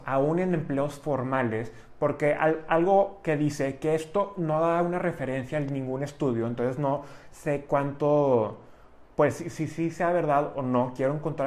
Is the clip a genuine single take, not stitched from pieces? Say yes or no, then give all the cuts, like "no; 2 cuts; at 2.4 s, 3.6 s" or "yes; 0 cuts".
yes; 0 cuts